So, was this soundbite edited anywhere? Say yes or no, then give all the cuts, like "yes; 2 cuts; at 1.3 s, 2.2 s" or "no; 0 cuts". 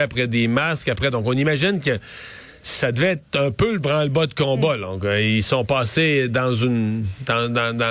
no; 0 cuts